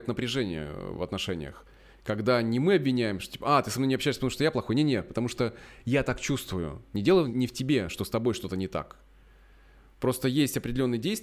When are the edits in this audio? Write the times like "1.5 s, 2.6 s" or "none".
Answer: none